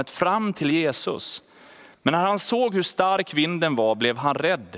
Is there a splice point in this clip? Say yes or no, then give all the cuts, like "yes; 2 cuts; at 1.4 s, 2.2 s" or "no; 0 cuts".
no; 0 cuts